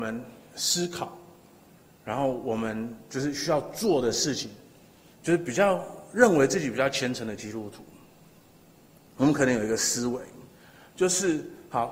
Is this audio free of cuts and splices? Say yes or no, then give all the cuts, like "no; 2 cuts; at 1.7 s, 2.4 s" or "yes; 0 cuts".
no; 1 cut; at 5.1 s